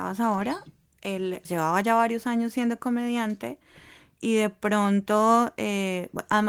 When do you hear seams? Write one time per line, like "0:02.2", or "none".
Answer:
0:01.4